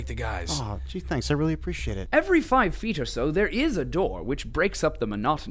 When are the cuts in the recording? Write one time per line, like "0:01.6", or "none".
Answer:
0:02.1